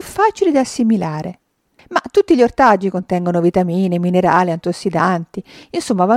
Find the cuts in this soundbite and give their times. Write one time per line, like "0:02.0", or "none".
none